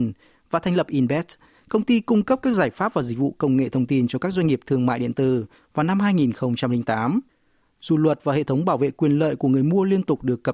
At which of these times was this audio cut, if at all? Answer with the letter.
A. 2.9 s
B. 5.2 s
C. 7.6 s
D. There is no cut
D